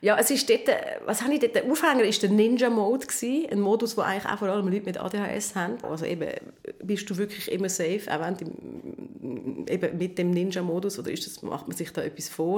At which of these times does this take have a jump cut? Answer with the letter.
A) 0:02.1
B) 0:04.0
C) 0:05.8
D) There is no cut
C